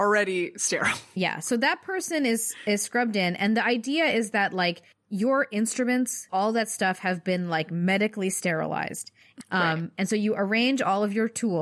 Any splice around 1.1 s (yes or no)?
no